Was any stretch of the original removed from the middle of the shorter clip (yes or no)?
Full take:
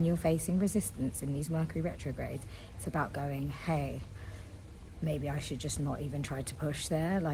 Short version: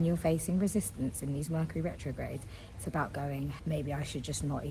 yes